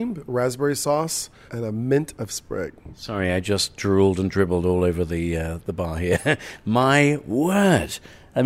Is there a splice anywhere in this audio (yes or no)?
yes